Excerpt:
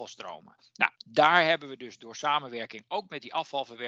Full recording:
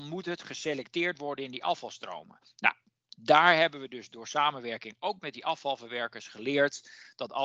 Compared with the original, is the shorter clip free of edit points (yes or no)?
no